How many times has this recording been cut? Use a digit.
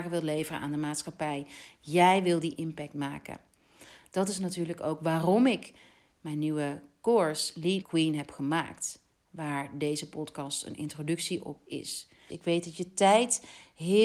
2